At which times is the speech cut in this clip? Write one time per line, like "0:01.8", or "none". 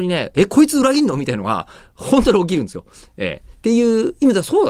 none